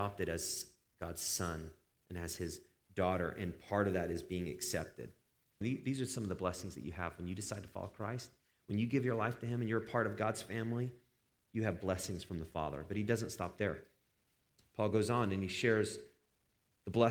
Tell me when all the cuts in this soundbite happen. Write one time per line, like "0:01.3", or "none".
0:05.6